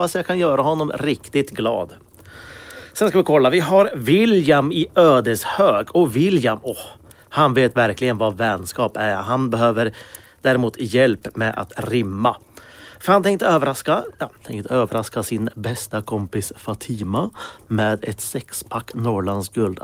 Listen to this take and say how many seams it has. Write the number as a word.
one